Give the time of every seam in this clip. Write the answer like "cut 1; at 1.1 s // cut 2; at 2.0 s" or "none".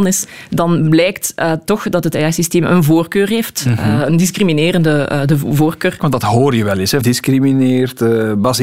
cut 1; at 6.0 s // cut 2; at 7.0 s